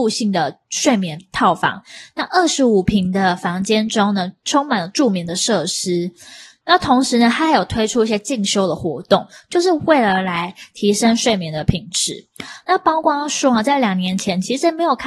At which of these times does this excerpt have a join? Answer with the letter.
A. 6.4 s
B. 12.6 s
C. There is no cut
C